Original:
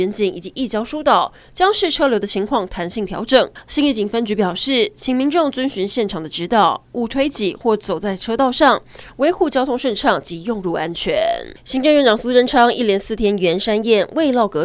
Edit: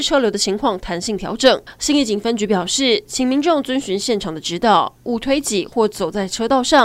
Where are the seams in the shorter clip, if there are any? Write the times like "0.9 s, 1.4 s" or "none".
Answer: none